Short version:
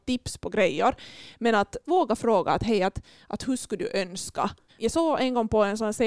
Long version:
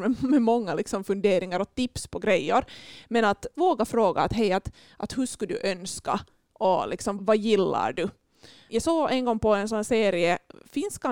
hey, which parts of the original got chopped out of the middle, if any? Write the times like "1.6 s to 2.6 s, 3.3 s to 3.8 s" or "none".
6.4 s to 8.6 s